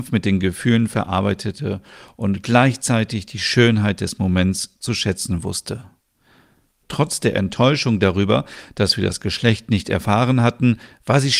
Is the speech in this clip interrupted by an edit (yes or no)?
yes